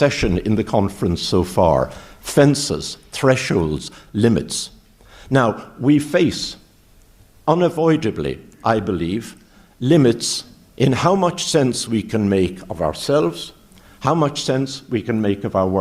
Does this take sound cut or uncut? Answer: uncut